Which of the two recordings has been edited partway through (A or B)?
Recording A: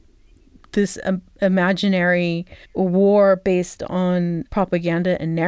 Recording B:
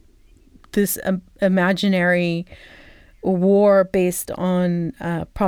A